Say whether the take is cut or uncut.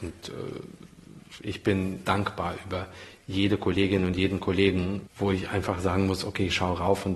cut